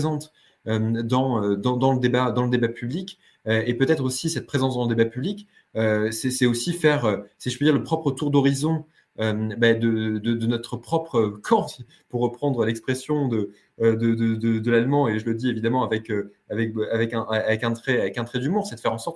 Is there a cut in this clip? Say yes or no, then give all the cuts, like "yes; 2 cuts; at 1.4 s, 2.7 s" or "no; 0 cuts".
no; 0 cuts